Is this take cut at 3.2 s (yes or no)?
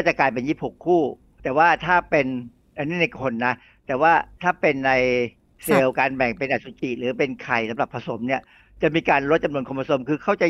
no